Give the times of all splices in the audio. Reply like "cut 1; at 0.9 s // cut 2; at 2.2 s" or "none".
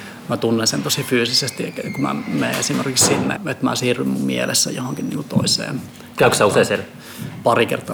cut 1; at 3.4 s